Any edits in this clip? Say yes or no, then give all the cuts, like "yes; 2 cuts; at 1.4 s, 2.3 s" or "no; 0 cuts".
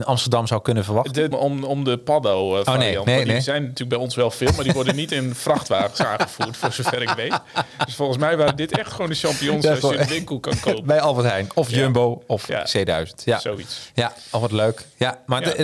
yes; 1 cut; at 1.3 s